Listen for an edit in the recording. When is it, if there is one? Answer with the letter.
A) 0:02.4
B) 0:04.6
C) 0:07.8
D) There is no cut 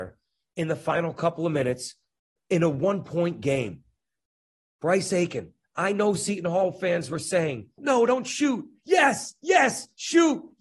C